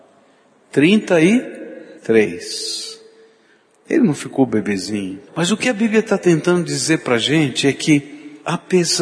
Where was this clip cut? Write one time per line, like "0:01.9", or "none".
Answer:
0:02.0
0:05.3